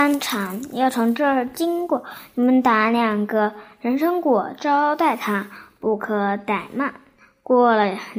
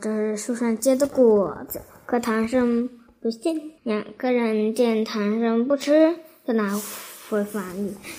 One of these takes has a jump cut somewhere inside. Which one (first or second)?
second